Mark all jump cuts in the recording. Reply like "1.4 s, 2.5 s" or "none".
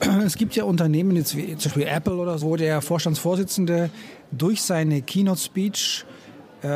2.4 s